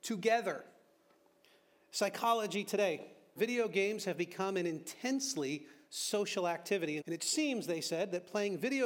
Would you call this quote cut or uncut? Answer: cut